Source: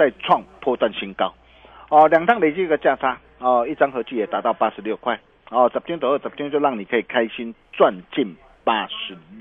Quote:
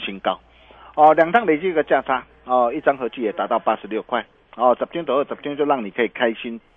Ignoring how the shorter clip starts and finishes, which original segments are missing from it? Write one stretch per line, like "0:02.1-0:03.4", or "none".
none